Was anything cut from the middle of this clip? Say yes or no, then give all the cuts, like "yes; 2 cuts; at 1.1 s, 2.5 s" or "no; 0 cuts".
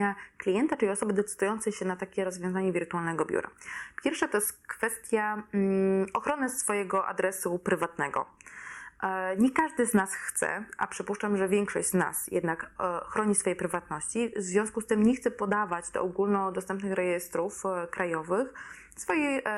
no; 0 cuts